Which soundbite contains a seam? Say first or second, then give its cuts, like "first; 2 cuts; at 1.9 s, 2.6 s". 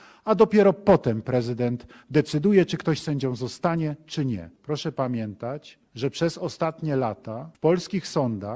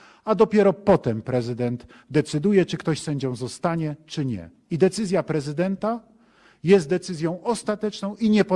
first; 2 cuts; at 4.6 s, 5.9 s